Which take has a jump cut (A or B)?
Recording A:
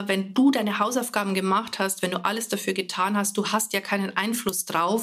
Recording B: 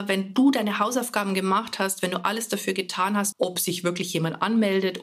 B